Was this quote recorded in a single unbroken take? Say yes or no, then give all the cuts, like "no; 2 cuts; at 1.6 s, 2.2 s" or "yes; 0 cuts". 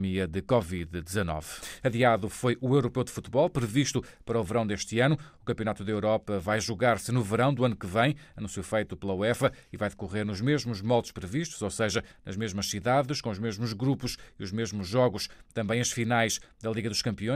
yes; 0 cuts